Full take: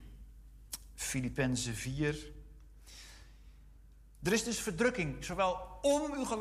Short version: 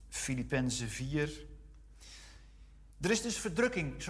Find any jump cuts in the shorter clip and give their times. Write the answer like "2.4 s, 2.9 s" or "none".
2.9 s